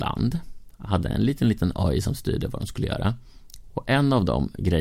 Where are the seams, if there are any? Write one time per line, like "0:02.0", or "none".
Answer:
none